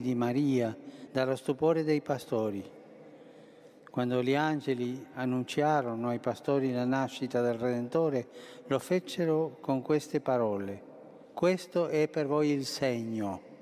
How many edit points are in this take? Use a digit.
2